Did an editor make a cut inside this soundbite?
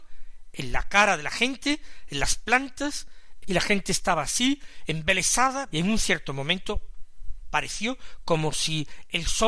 yes; 2 cuts; at 3.4 s, 5.7 s

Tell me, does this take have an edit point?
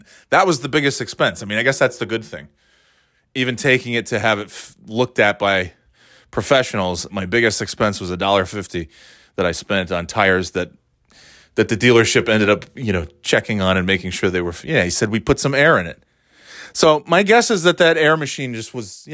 yes; 1 cut; at 7.1 s

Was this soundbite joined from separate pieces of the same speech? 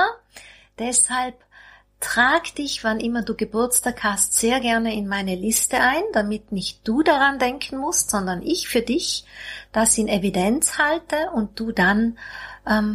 no; 0 cuts

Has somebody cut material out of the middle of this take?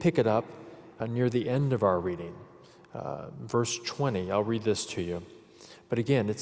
no; 0 cuts

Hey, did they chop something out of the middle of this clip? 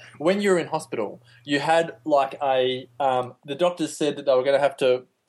yes; 1 cut; at 3.4 s

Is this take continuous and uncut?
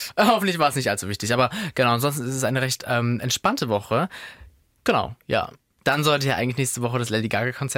yes; 0 cuts

